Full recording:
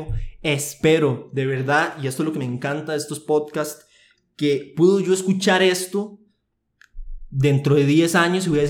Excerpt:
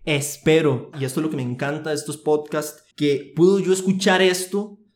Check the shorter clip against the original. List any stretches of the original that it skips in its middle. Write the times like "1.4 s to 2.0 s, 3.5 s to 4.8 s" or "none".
1.3 s to 2.0 s, 3.9 s to 4.3 s